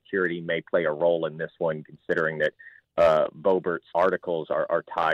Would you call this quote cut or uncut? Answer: cut